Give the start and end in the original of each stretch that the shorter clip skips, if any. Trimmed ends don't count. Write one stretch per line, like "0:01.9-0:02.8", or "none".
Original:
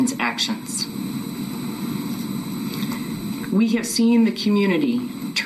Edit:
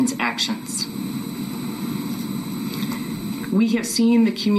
none